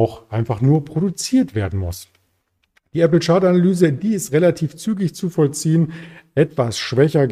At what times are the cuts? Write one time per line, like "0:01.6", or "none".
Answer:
none

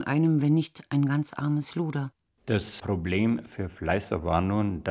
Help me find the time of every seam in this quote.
0:02.4

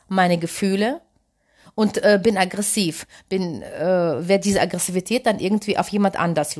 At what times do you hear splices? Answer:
none

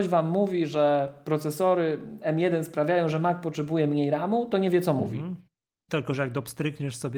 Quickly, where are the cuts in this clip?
0:05.9

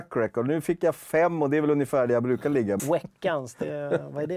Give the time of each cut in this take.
0:02.8

